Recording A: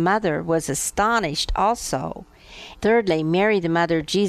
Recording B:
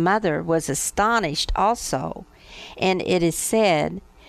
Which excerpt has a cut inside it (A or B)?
A